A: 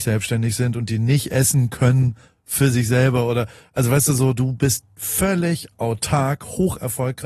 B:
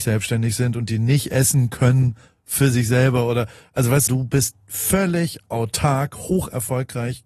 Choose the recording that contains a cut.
B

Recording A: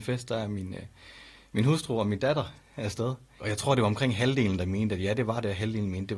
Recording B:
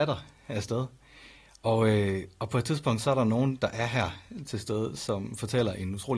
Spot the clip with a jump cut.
A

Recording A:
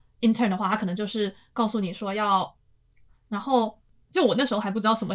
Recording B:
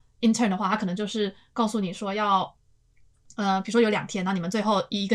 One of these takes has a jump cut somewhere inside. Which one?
A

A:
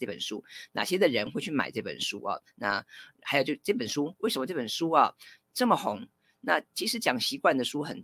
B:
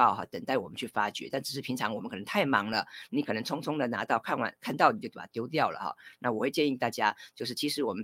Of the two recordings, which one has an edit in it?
A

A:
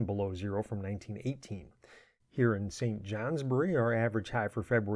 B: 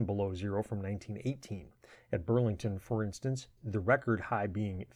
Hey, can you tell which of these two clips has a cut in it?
B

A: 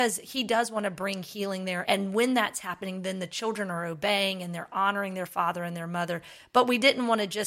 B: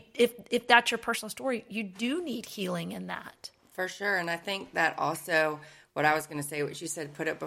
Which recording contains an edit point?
A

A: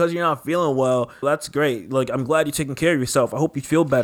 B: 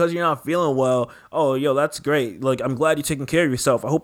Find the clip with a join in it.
A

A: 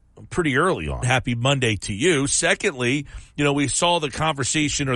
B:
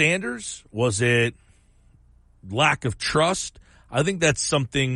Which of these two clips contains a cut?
A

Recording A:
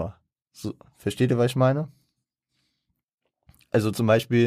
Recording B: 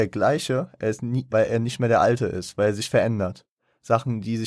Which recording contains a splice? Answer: B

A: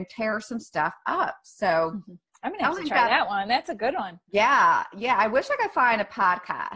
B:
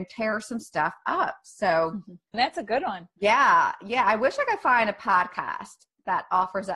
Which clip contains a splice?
B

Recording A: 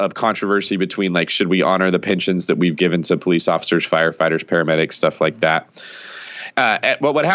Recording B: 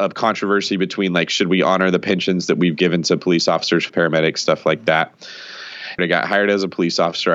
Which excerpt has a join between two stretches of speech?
B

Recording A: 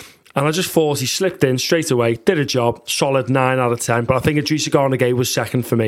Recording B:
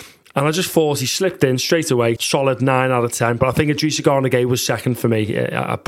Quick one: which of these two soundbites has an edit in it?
B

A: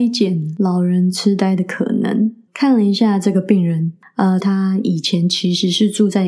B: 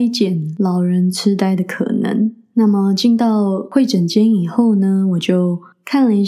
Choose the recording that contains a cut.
A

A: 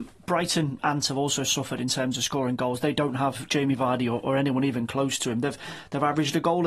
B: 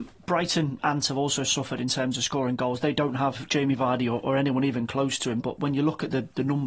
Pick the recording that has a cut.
B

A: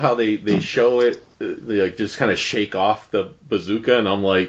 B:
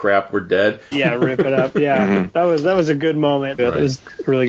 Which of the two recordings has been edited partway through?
B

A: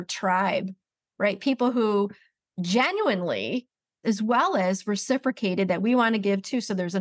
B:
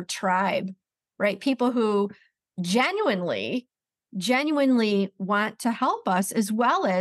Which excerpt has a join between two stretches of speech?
A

